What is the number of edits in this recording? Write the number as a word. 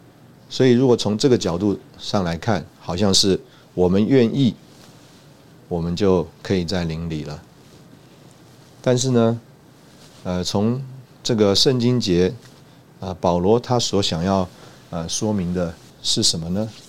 one